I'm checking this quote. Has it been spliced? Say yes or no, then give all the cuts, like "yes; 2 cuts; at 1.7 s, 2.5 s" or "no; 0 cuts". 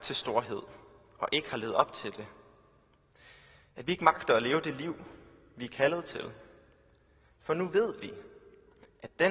no; 0 cuts